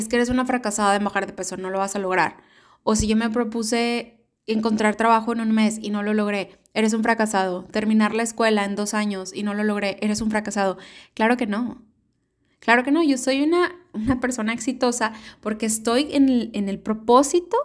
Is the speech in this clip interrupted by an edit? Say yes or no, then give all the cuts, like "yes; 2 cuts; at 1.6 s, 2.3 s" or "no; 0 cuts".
no; 0 cuts